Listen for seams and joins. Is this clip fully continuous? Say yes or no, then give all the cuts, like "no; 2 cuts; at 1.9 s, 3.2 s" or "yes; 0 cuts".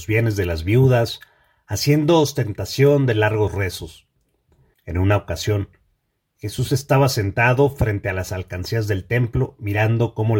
no; 1 cut; at 4.7 s